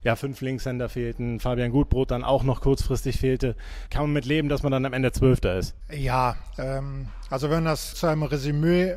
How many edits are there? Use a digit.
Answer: 1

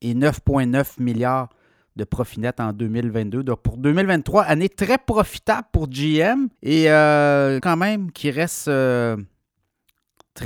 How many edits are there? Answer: 2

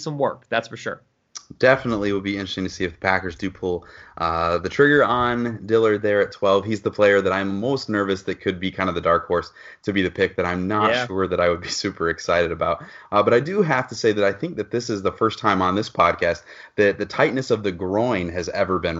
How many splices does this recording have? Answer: 0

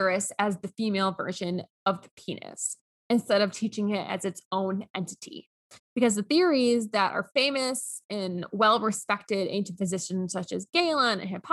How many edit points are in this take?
2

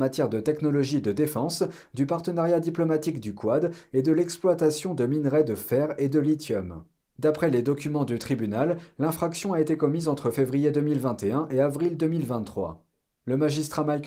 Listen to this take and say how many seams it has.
0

